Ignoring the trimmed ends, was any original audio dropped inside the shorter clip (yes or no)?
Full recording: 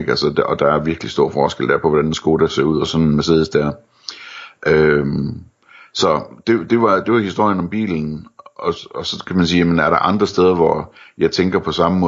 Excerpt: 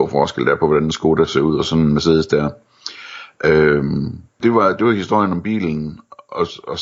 yes